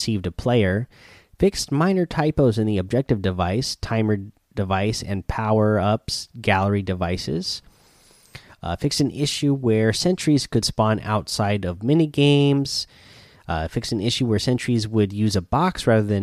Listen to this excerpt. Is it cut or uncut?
uncut